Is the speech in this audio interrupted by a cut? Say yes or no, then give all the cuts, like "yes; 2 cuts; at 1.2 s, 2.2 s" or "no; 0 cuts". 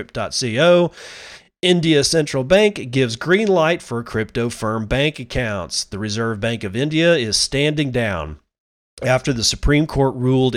no; 0 cuts